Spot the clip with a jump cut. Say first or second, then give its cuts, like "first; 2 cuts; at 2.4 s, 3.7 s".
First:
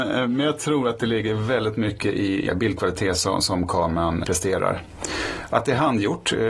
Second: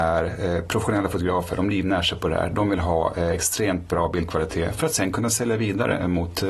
first; 2 cuts; at 2.5 s, 4.2 s